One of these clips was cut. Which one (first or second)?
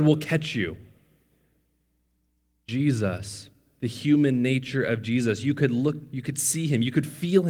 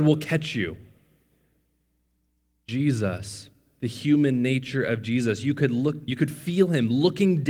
second